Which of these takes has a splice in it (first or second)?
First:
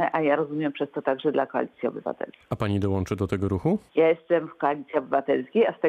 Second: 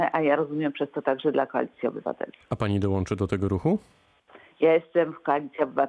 first